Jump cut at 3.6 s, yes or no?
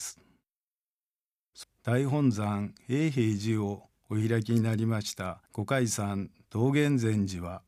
no